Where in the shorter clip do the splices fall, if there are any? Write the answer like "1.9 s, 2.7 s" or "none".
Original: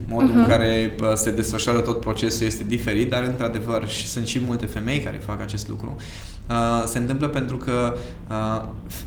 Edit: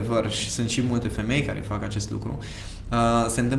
none